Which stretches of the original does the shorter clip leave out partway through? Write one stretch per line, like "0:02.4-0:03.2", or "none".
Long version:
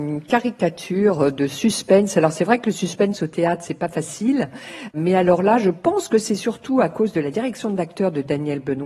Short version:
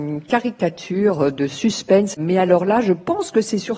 0:02.1-0:04.9